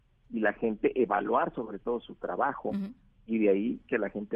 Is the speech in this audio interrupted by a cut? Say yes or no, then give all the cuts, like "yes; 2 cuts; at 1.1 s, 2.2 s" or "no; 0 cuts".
no; 0 cuts